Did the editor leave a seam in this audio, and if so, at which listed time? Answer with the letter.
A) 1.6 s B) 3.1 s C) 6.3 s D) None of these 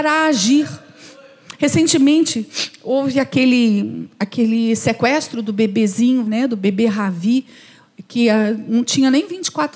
C